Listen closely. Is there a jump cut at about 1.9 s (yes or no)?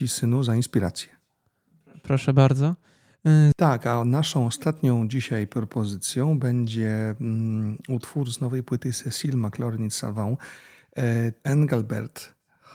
no